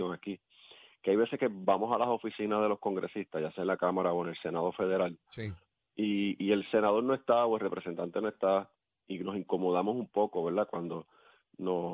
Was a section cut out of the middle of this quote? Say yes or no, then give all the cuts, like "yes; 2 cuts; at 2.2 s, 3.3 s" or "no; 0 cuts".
no; 0 cuts